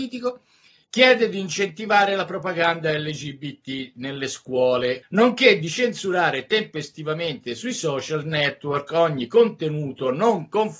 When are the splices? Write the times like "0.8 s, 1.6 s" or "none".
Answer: 5.0 s